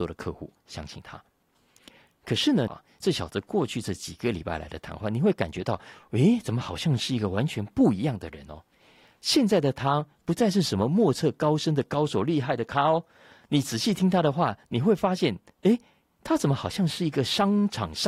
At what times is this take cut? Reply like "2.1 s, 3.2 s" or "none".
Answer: 2.7 s